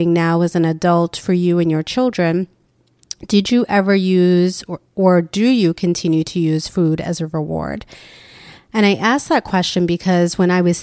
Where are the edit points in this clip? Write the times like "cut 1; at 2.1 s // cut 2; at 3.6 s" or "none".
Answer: cut 1; at 4.9 s